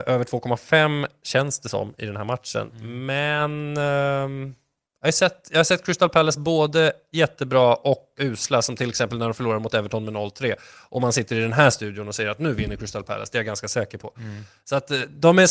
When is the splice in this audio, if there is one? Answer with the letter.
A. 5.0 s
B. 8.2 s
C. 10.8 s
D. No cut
B